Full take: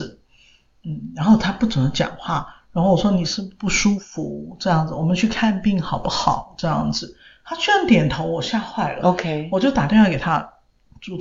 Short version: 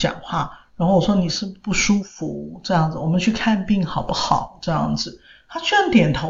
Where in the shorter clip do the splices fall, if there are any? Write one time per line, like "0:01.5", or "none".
none